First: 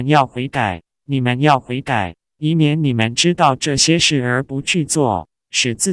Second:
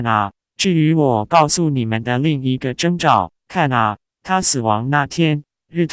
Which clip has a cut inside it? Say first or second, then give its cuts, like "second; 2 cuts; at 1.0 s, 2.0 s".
second; 1 cut; at 3.4 s